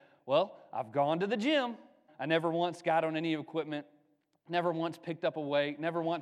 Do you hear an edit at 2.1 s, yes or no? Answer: yes